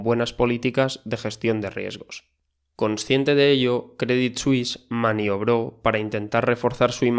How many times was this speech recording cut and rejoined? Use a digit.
1